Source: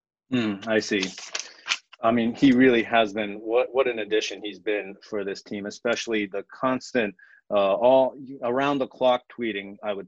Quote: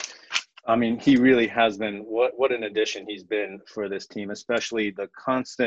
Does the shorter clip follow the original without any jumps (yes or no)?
yes